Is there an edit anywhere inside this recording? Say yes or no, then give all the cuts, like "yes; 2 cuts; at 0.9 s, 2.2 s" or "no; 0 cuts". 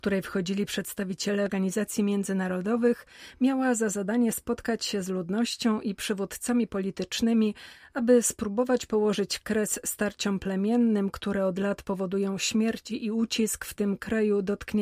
no; 0 cuts